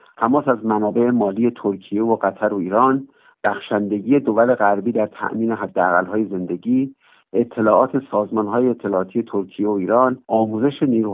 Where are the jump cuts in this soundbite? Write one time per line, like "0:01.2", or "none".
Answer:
0:10.2